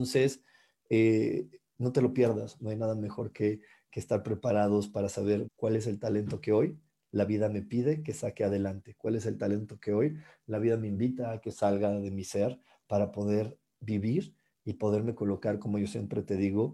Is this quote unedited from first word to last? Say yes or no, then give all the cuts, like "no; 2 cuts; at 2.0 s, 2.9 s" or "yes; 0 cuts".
no; 2 cuts; at 2.6 s, 5.4 s